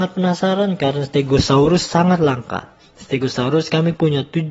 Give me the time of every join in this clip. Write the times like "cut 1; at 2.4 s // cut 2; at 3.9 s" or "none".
none